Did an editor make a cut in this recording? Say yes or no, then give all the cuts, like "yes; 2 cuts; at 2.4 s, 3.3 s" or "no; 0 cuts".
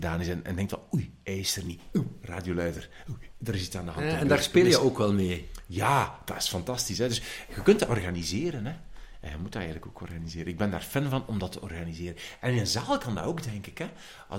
no; 0 cuts